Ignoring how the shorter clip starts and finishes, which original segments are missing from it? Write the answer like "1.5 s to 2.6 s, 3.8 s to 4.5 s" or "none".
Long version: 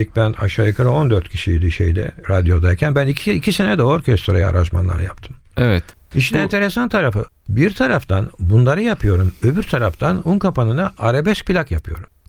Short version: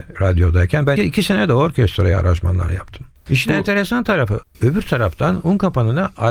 3.0 s to 3.3 s, 5.5 s to 6.0 s, 7.4 s to 9.4 s